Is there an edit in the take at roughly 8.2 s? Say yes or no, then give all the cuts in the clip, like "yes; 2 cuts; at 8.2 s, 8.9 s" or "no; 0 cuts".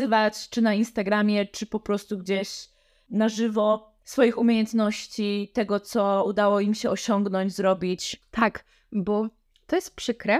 yes; 1 cut; at 8.2 s